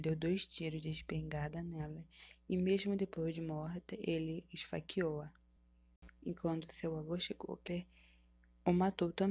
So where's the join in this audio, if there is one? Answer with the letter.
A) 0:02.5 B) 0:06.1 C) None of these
B